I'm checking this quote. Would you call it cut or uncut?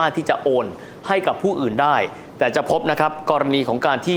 uncut